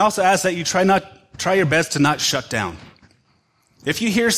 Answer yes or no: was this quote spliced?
no